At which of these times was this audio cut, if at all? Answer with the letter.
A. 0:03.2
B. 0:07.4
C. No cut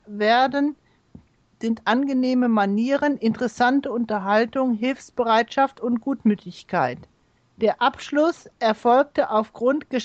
B